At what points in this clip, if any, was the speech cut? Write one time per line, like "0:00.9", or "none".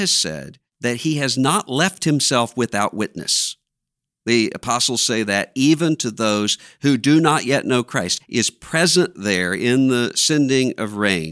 0:08.2